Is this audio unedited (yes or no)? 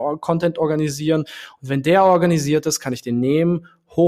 yes